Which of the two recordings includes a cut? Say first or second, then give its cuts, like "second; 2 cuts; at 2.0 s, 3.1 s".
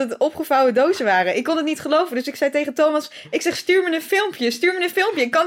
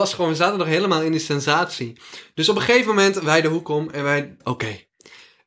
second; 1 cut; at 4.4 s